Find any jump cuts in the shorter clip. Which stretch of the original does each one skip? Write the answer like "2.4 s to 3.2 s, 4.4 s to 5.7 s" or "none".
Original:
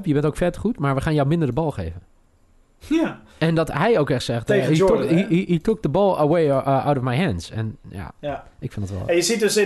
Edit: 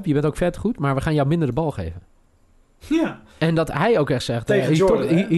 none